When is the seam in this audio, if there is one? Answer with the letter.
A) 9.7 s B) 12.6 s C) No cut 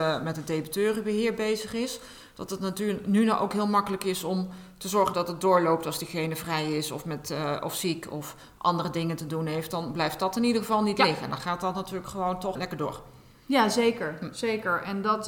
B